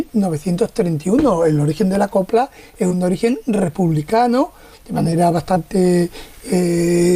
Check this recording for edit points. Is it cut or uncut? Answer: cut